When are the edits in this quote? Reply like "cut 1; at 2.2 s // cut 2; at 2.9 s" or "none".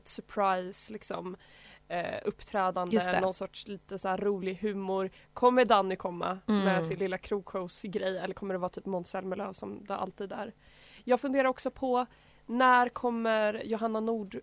none